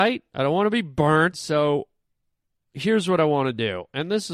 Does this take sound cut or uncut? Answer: cut